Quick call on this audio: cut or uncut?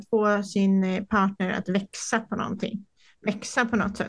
uncut